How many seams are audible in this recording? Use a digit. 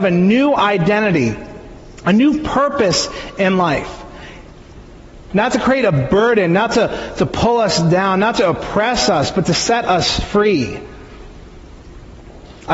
1